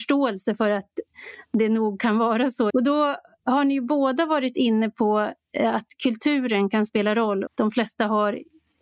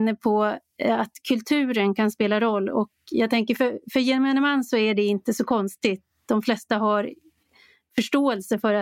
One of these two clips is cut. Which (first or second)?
first